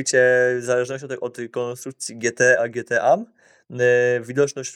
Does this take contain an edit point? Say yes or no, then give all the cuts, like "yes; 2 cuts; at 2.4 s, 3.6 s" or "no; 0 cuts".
no; 0 cuts